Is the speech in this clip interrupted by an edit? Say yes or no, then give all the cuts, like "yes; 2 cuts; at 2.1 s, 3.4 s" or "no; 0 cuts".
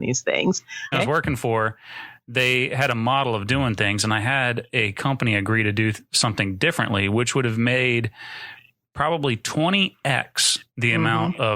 yes; 1 cut; at 0.9 s